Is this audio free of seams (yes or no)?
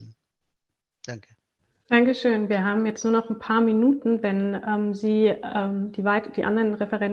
yes